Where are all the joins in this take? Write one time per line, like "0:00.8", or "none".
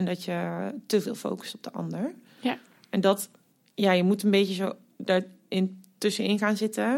none